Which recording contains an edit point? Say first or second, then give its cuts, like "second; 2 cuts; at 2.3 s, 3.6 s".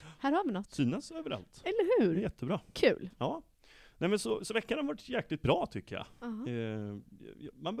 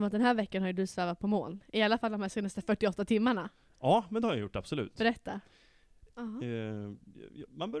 second; 1 cut; at 6.2 s